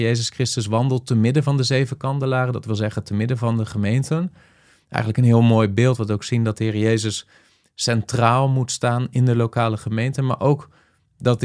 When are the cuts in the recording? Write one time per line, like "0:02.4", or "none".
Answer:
none